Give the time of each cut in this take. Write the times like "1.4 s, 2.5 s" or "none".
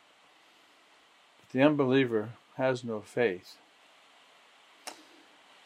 none